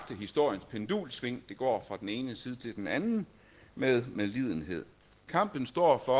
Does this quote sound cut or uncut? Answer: cut